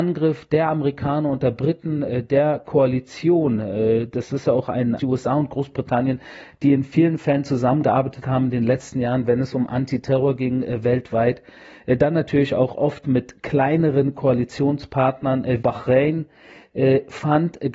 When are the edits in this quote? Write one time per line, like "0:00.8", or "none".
0:05.0
0:15.6